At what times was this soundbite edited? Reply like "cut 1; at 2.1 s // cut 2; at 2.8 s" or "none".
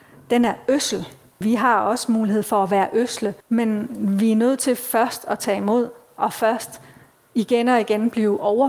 cut 1; at 1.4 s // cut 2; at 3.4 s